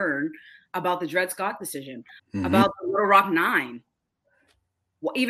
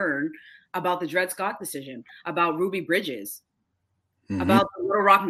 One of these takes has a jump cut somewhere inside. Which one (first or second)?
first